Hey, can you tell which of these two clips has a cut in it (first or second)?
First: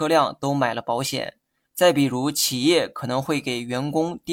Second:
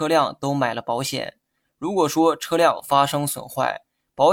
first